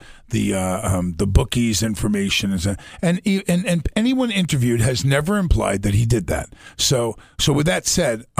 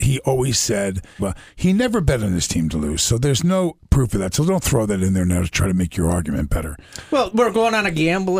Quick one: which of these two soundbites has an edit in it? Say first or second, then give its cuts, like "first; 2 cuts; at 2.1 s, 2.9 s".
second; 1 cut; at 1.2 s